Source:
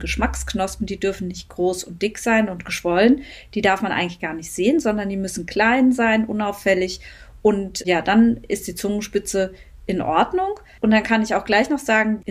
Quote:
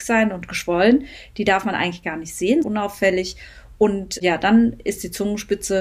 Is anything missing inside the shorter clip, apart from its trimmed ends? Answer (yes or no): yes